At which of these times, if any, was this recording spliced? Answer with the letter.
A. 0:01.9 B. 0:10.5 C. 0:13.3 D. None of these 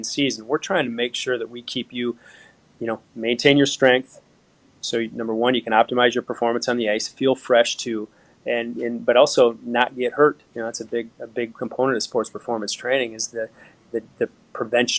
B